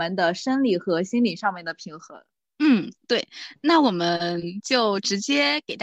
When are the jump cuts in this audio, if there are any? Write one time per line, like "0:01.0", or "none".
none